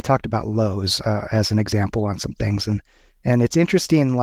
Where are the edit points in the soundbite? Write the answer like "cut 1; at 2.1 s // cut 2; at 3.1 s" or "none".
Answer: none